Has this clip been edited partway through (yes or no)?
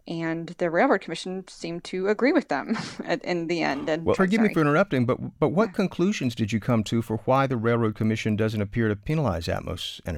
yes